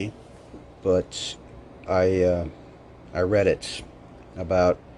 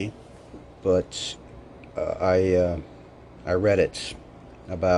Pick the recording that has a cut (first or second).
first